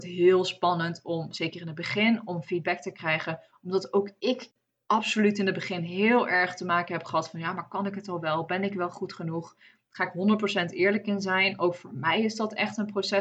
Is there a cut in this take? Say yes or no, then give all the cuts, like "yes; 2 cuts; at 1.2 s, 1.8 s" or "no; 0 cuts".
no; 0 cuts